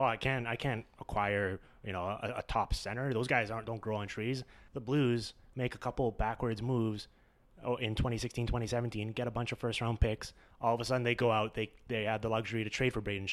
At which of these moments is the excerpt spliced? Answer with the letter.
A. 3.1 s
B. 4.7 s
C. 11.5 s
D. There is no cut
B